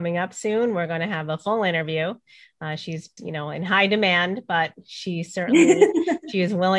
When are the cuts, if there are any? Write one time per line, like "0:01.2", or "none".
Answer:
0:03.2